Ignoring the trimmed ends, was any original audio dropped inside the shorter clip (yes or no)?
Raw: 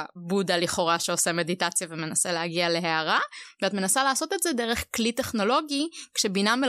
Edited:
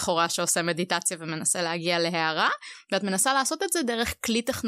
no